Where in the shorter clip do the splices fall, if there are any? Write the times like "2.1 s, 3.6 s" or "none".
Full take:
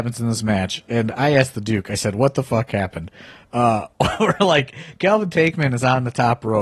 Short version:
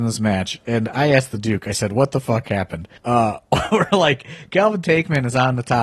3.0 s